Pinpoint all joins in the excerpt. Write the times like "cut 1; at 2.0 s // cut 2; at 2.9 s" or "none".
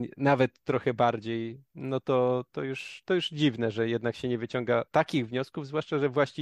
none